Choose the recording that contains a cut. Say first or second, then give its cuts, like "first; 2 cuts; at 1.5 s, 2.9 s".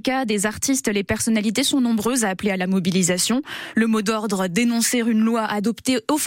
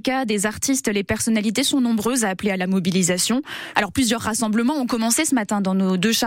second; 1 cut; at 3.7 s